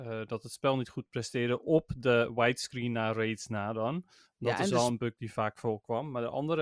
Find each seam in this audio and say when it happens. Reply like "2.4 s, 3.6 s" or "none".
none